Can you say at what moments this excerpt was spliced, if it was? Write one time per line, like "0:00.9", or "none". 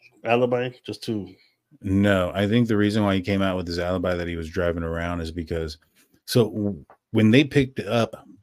none